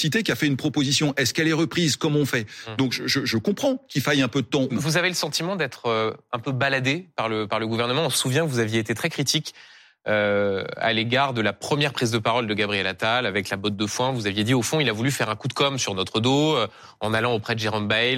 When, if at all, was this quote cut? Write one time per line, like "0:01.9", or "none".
0:04.7